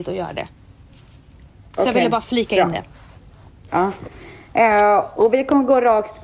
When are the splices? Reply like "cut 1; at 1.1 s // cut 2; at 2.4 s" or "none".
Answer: cut 1; at 3.7 s